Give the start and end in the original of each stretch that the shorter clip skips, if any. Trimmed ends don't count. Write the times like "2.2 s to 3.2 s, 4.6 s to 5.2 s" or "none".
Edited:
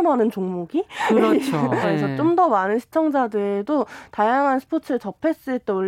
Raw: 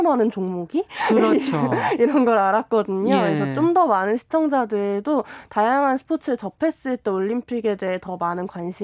1.8 s to 3.2 s